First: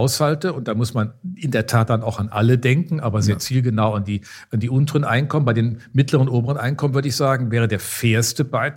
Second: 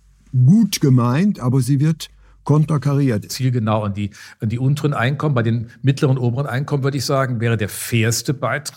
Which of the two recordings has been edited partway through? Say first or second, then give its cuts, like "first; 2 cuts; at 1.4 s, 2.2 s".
second; 1 cut; at 3.3 s